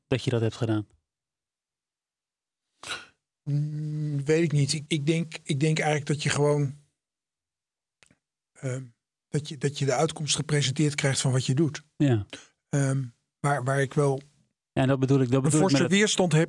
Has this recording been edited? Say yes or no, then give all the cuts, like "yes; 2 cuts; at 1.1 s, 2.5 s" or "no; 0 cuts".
yes; 1 cut; at 4.9 s